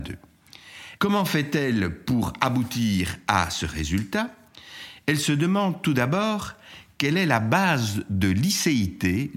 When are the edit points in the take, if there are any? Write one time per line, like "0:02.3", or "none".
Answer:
0:01.0